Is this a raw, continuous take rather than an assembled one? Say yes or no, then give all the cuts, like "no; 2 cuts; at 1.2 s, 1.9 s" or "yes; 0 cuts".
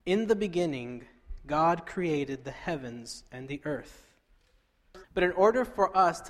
no; 1 cut; at 5.0 s